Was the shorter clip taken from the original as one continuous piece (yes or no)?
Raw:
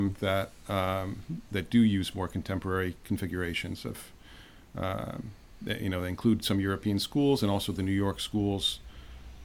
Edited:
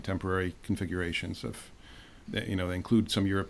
no